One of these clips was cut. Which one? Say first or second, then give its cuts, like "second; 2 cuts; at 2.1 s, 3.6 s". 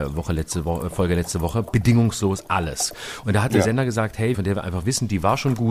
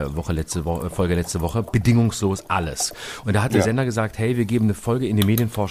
first; 1 cut; at 4.3 s